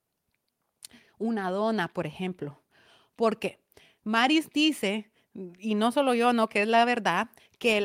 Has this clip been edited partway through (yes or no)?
no